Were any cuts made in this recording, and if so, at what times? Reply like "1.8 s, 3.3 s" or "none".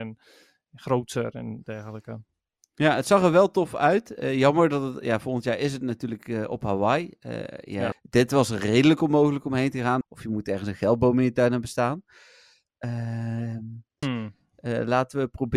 7.9 s, 10.0 s, 14.0 s